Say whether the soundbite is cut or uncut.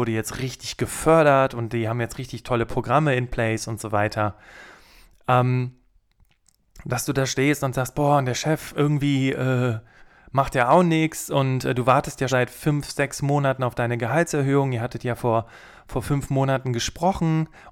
cut